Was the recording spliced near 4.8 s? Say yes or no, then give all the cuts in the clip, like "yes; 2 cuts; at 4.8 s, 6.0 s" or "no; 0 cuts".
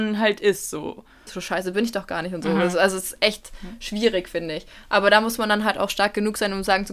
no; 1 cut; at 1.3 s